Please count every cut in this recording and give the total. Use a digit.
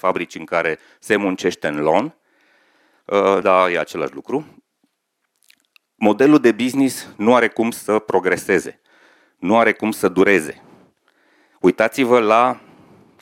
1